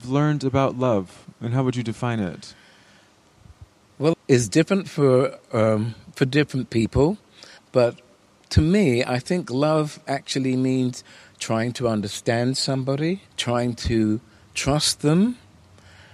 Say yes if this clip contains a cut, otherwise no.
yes